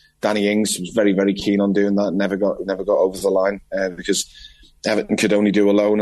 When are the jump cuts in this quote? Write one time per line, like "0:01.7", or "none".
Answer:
none